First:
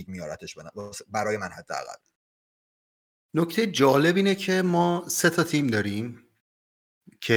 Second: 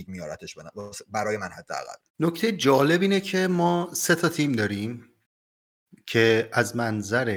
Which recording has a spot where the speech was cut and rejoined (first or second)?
second